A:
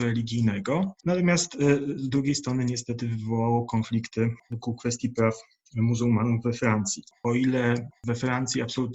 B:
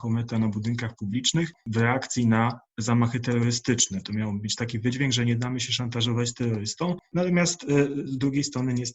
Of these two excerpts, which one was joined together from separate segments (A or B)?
A